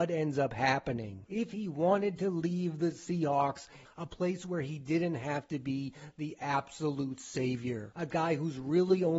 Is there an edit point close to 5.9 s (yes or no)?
no